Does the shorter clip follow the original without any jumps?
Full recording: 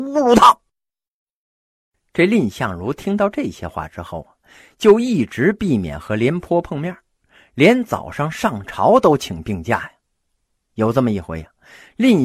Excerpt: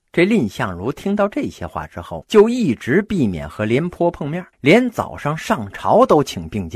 no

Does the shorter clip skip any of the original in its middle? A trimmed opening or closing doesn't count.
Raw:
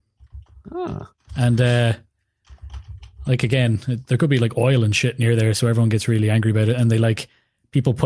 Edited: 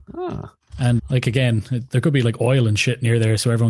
yes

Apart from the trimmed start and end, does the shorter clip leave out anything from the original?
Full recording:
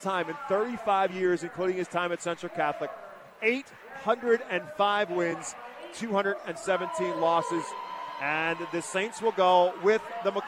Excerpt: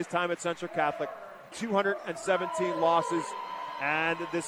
yes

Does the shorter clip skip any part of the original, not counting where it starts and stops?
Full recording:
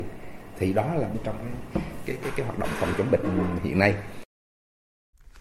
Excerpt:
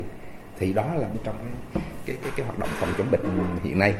no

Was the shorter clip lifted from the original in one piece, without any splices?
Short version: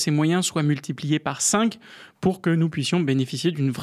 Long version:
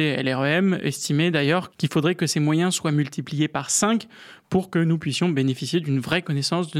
yes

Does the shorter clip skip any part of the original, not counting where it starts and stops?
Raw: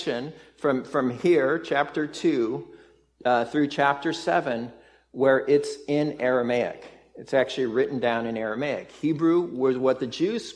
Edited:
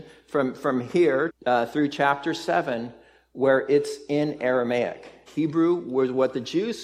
yes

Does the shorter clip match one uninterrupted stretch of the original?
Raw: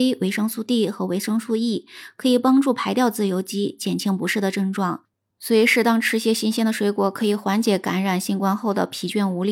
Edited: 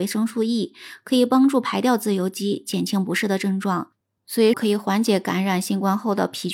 no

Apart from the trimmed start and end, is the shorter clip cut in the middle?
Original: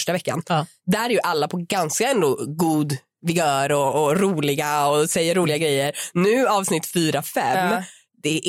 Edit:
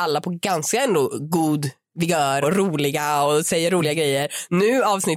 yes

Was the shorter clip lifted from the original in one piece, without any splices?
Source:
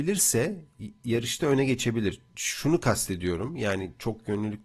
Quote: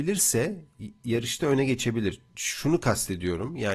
yes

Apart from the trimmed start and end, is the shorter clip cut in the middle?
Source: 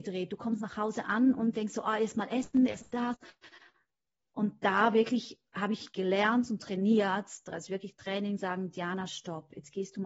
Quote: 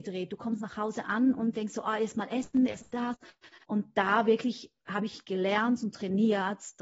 yes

